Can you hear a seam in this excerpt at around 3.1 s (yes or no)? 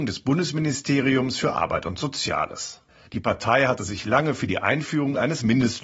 yes